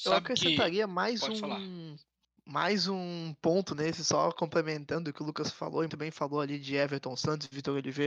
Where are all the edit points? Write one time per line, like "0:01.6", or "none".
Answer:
0:05.9